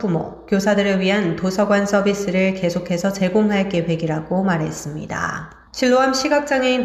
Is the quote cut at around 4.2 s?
no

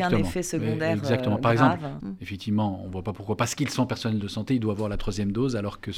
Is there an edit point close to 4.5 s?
no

